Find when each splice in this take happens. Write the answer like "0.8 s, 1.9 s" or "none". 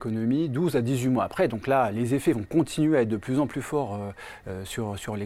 none

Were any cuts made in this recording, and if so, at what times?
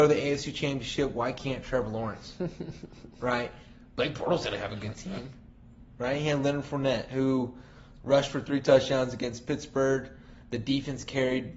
none

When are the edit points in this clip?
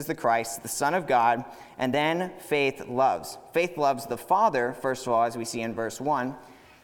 none

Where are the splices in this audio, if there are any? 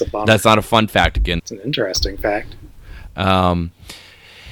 1.4 s

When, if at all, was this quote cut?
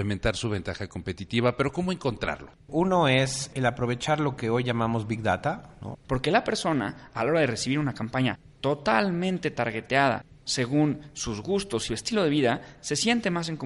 2.7 s, 5.9 s

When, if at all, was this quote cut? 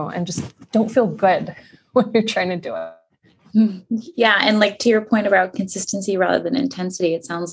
none

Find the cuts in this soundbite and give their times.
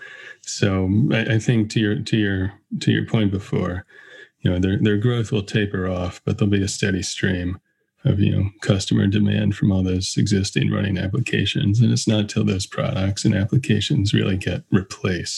none

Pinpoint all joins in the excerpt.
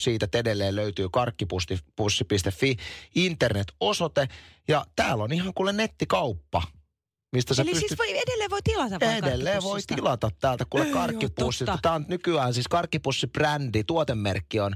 none

